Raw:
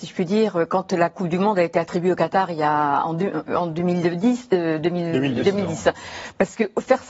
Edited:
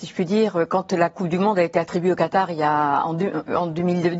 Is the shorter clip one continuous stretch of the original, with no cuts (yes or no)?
yes